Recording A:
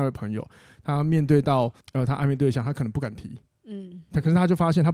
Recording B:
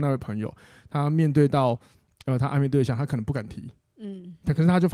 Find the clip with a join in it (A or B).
A